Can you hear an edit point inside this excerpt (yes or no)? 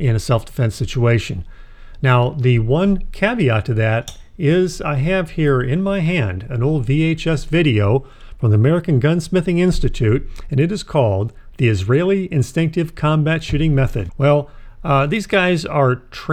yes